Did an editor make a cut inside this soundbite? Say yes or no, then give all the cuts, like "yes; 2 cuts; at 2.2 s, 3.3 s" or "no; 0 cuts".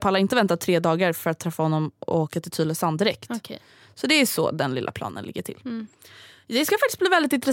no; 0 cuts